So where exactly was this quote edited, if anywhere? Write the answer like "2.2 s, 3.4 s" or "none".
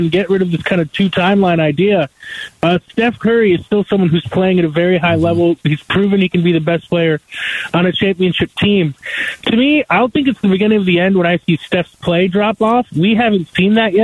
none